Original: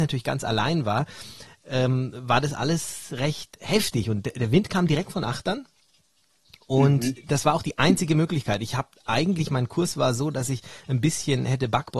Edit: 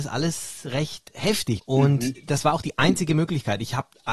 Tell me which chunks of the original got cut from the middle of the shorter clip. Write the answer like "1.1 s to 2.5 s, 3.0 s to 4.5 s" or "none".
4.0 s to 6.6 s